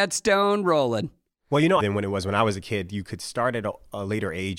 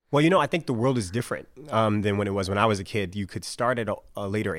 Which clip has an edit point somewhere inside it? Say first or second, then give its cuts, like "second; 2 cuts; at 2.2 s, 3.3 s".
first; 1 cut; at 1.8 s